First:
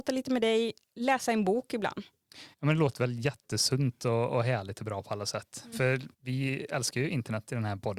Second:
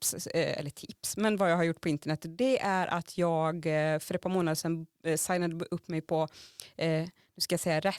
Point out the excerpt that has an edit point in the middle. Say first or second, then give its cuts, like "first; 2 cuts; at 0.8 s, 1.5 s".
first; 2 cuts; at 2.5 s, 6.1 s